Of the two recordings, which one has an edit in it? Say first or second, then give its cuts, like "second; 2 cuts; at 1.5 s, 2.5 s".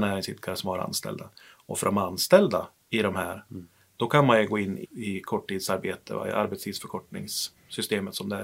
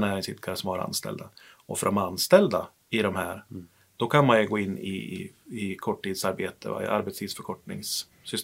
first; 1 cut; at 4.8 s